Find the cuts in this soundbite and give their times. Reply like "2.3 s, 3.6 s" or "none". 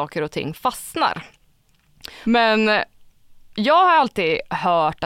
2.2 s